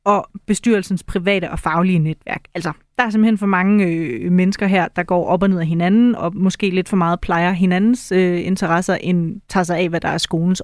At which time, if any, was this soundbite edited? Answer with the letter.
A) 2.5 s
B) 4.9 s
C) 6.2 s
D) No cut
C